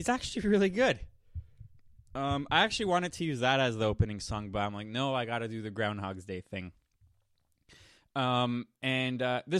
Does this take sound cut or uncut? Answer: uncut